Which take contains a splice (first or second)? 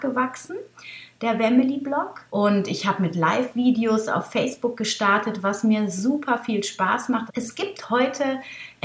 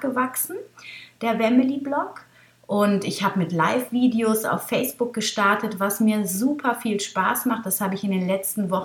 first